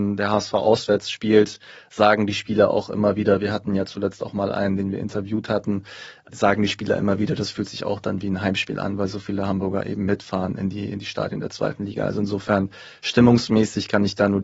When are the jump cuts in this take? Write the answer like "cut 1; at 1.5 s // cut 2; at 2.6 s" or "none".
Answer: none

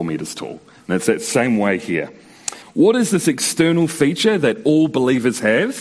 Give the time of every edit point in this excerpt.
cut 1; at 2.6 s

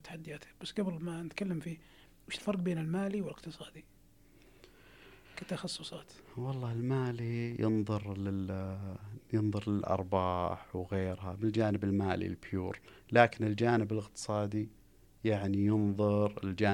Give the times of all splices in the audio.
none

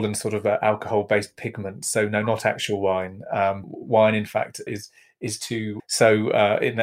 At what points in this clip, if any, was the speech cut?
cut 1; at 3.6 s // cut 2; at 4.7 s // cut 3; at 5.8 s

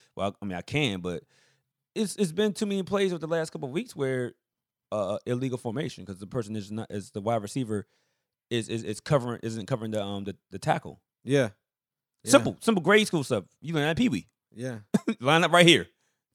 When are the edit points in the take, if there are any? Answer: none

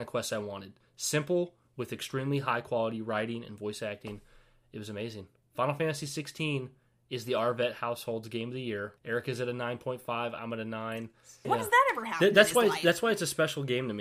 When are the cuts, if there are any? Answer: cut 1; at 9.0 s // cut 2; at 11.4 s

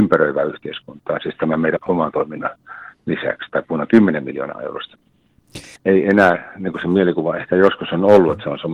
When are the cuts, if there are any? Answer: cut 1; at 1.8 s // cut 2; at 5.8 s

